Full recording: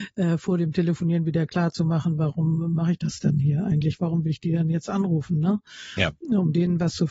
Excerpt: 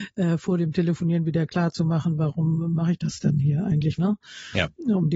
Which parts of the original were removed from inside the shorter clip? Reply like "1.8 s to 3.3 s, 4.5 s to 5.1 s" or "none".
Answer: 4.0 s to 5.4 s